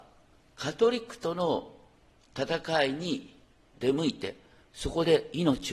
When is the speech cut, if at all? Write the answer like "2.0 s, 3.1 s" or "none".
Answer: 3.7 s